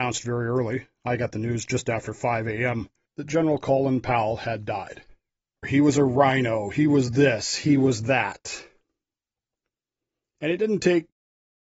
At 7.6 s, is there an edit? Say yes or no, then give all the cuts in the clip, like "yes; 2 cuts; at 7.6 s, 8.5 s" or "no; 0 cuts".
no; 2 cuts; at 3.1 s, 5.6 s